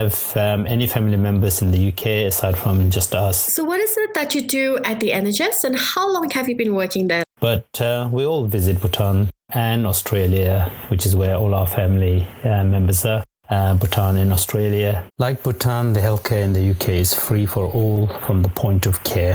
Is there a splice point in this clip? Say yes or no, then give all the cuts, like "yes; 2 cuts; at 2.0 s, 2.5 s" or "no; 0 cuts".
yes; 2 cuts; at 7.2 s, 15.1 s